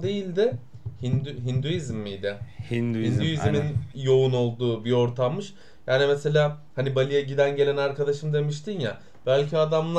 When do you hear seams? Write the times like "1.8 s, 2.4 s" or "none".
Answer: none